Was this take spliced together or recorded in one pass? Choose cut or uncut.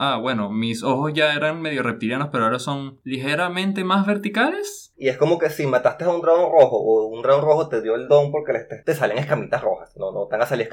cut